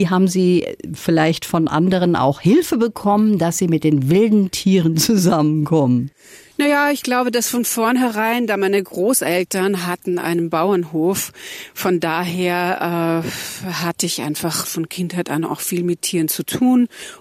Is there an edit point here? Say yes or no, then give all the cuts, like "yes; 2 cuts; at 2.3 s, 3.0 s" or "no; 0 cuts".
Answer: yes; 1 cut; at 14.6 s